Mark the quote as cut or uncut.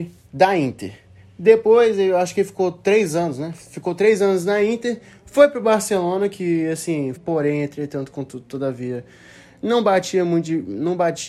cut